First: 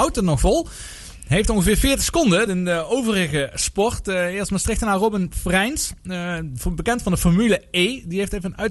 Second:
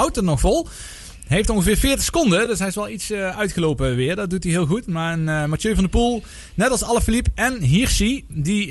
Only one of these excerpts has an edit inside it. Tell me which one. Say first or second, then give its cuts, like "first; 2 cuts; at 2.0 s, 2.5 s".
first; 1 cut; at 2.5 s